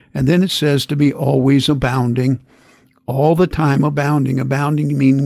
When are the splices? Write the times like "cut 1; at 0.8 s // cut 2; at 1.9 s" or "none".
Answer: none

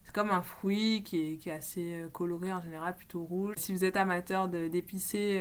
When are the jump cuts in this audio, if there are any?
cut 1; at 3.5 s

